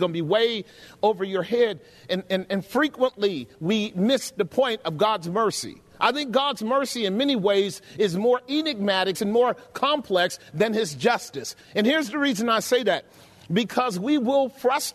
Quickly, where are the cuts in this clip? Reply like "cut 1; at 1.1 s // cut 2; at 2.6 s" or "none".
cut 1; at 9.1 s